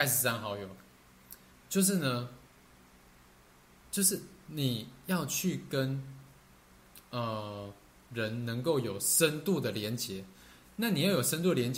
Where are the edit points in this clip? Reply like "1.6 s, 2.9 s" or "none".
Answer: 1.5 s